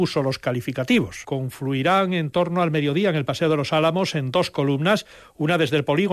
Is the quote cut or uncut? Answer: cut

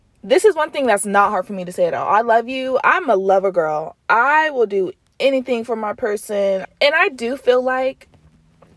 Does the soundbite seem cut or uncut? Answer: cut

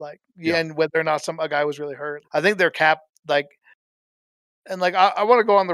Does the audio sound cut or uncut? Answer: cut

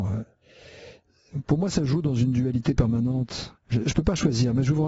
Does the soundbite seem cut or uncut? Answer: cut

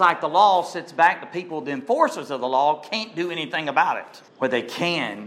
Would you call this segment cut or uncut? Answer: cut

